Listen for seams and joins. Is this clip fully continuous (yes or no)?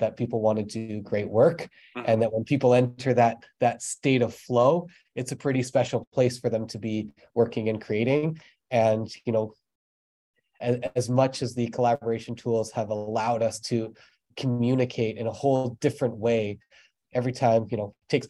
yes